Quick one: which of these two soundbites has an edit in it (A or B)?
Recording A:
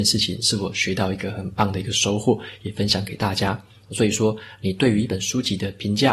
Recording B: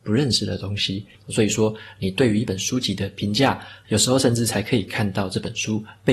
B